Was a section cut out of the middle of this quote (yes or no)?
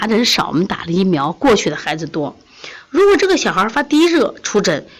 no